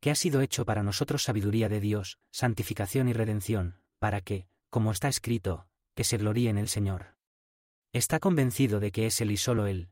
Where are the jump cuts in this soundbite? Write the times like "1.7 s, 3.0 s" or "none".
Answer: 2.2 s, 5.8 s, 7.7 s